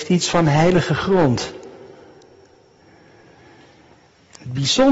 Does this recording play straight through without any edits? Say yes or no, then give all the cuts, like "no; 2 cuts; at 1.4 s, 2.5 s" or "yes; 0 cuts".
yes; 0 cuts